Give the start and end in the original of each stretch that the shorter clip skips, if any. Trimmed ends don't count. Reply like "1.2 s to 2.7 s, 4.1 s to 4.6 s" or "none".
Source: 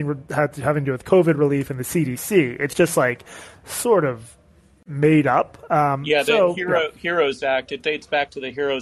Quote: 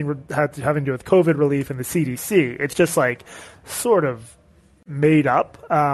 none